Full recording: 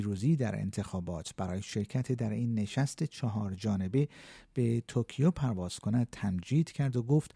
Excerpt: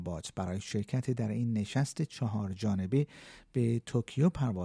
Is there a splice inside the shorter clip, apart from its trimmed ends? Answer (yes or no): no